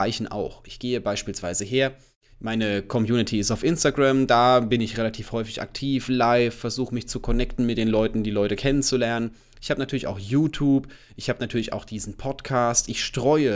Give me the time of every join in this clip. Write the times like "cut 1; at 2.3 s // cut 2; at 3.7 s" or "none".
none